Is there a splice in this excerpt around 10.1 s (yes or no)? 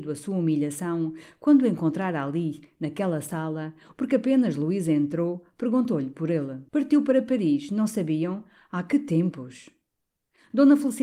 no